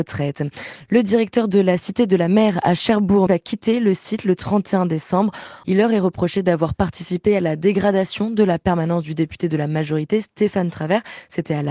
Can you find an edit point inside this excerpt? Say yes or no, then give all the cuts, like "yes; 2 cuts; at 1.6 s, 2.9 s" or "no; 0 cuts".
yes; 2 cuts; at 3.3 s, 5.6 s